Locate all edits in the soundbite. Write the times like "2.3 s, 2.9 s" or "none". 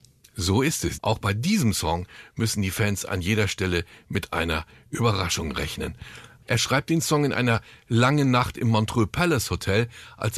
1.0 s, 6.4 s